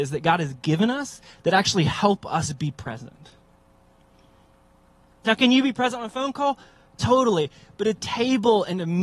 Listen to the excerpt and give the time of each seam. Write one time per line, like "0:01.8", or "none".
0:05.2